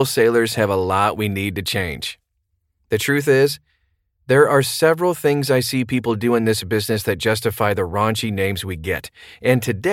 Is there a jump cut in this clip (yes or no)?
no